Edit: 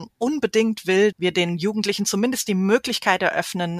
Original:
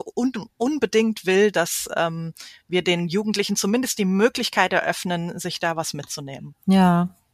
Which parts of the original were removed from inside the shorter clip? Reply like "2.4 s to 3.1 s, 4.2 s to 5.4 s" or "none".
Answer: 1.5 s to 2.6 s

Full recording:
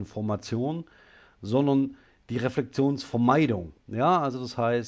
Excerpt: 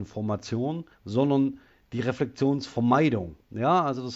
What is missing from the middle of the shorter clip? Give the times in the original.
0.9 s to 1.3 s

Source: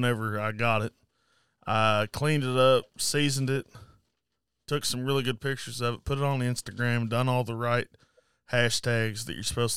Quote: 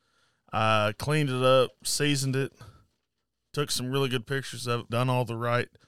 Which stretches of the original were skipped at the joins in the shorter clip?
6.0 s to 7.1 s

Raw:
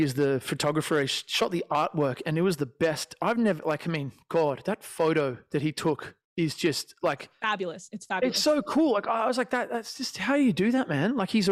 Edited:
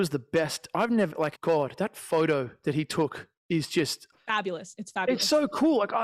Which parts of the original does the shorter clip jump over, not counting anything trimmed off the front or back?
3.8 s to 4.2 s, 7.0 s to 7.3 s

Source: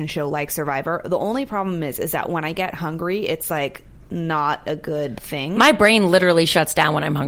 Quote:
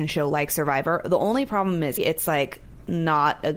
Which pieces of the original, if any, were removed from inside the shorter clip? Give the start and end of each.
2.0 s to 3.2 s

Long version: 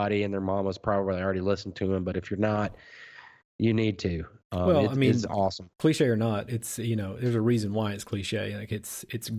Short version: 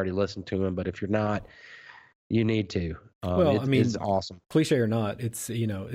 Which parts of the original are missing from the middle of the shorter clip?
none

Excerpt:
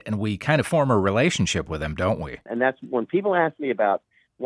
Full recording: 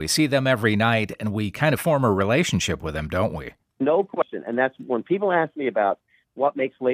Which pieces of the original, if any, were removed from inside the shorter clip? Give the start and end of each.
3.6 s to 4.4 s

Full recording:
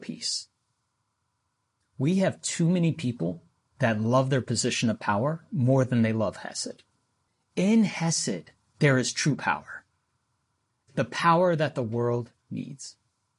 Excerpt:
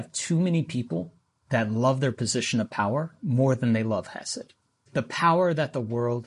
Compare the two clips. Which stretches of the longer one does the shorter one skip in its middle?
7.1 s to 10.9 s

